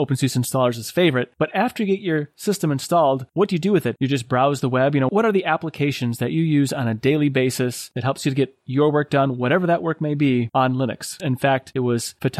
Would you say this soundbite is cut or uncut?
cut